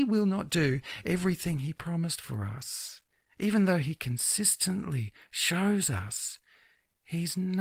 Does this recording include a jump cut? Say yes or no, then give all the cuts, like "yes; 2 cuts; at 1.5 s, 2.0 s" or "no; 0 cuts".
no; 0 cuts